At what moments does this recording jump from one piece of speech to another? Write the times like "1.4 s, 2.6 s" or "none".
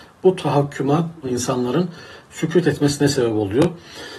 1.2 s